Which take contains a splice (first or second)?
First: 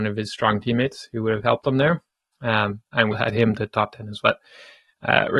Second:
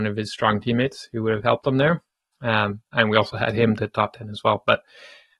first